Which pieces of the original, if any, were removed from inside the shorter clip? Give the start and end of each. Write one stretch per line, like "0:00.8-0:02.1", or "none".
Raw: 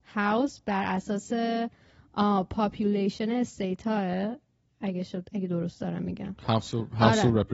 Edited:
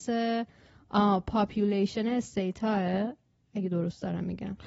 0:04.8-0:05.3